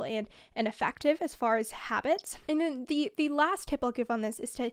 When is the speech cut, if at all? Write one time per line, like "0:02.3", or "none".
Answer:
0:02.4